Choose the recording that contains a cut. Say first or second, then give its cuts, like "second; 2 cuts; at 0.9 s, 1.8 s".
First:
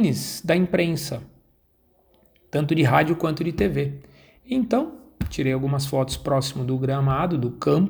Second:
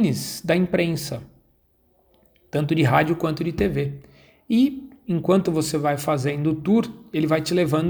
first; 1 cut; at 4.4 s